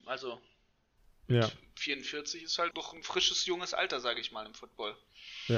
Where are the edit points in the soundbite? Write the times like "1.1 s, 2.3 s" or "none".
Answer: 2.7 s